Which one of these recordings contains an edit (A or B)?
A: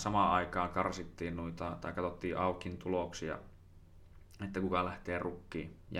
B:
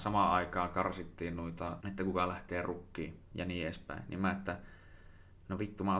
B